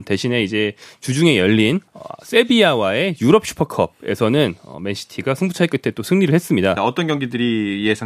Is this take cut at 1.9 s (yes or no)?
yes